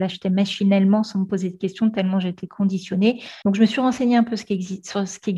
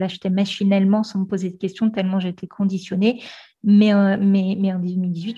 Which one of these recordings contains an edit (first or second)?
first